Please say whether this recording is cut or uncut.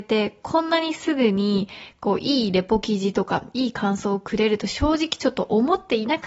uncut